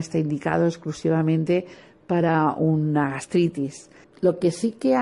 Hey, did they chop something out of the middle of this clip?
yes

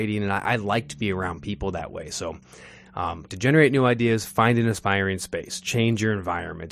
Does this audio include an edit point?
no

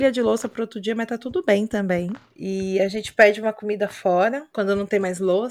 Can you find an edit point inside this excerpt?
no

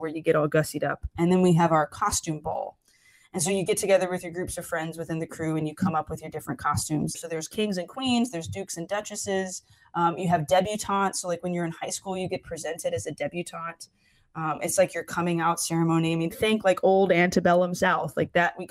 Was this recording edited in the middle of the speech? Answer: yes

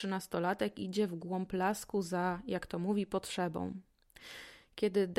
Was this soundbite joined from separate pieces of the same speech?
no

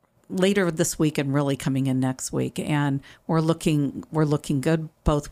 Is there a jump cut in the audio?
no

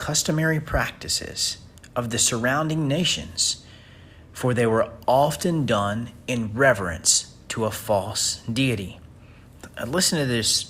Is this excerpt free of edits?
yes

